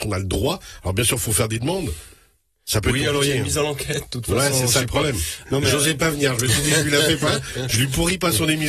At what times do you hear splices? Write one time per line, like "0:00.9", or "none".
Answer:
0:05.4